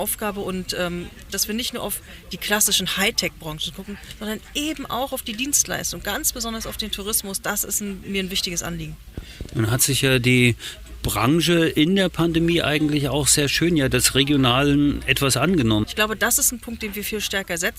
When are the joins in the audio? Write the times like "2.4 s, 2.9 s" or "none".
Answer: 1.3 s, 15.8 s